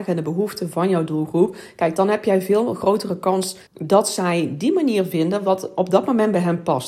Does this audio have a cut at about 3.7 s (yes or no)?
yes